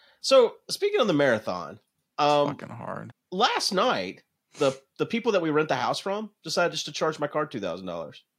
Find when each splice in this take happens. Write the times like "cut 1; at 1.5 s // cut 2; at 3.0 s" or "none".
cut 1; at 3.1 s